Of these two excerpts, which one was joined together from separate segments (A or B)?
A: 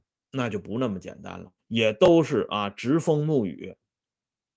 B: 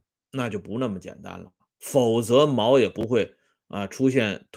A